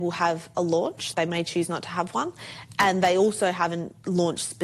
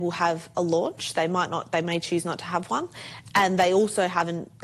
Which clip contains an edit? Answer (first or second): first